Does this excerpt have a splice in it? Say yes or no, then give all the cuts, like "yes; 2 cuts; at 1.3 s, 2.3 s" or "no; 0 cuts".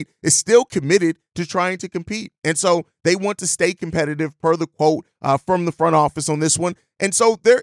no; 0 cuts